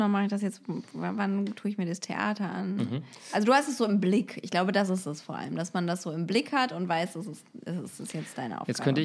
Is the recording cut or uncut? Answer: uncut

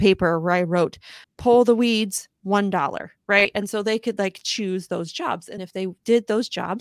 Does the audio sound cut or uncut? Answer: cut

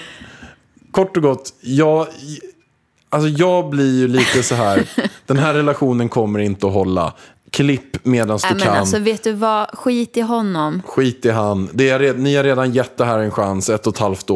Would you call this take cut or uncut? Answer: uncut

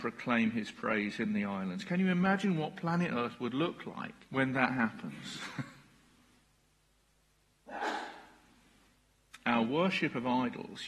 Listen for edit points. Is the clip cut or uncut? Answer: cut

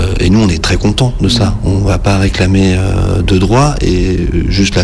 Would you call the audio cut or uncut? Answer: uncut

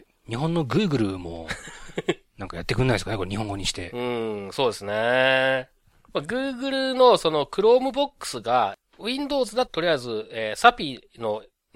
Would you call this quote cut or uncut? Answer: cut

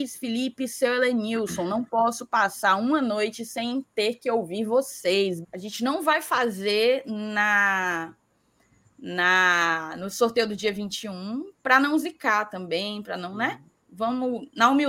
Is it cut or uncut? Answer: cut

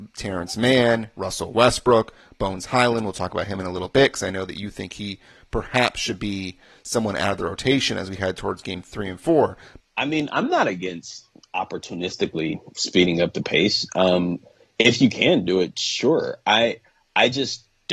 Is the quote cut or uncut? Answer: cut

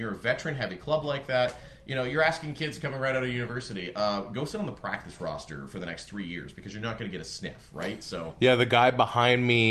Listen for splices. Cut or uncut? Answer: uncut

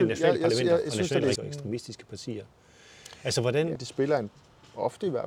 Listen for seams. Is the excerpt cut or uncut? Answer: cut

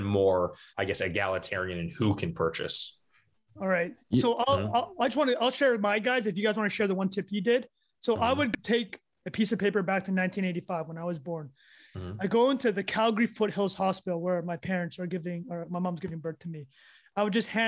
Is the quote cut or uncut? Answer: uncut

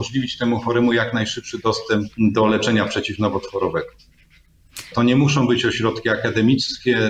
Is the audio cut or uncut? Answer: cut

